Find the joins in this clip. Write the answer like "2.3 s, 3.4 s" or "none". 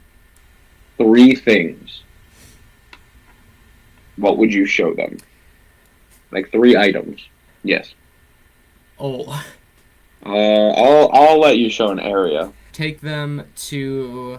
7.5 s, 10.1 s, 12.7 s